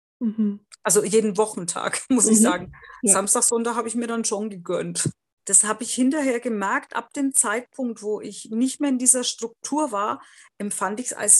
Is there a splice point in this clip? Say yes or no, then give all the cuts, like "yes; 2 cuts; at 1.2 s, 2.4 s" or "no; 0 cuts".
yes; 1 cut; at 5.4 s